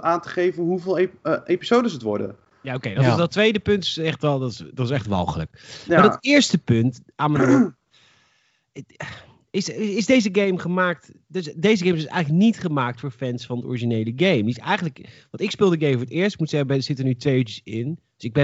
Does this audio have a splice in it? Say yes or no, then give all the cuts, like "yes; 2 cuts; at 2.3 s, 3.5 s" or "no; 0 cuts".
no; 0 cuts